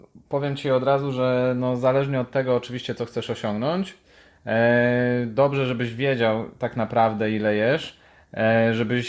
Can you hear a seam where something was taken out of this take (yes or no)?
no